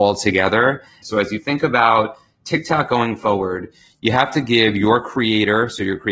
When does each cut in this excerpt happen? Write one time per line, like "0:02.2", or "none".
0:01.0